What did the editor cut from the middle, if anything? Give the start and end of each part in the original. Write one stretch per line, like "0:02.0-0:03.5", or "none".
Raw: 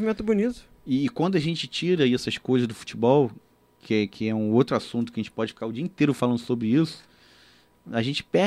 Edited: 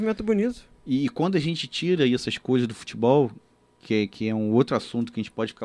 none